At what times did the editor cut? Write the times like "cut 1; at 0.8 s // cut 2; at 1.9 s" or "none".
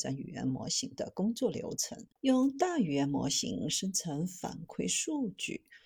cut 1; at 2.2 s